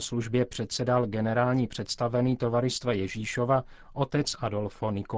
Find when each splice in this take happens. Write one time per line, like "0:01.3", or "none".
none